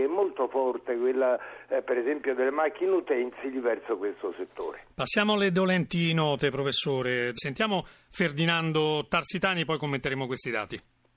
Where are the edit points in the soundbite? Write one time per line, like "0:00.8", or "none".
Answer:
0:07.4